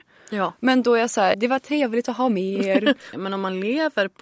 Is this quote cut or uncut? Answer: cut